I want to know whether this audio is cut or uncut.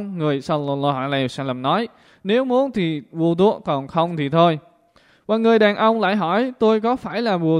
uncut